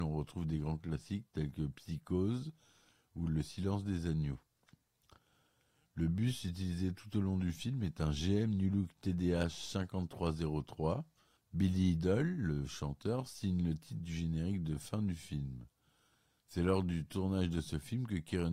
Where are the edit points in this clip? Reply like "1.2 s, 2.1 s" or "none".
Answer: 11.4 s